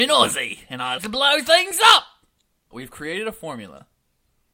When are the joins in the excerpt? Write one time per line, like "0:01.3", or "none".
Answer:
0:01.0
0:02.7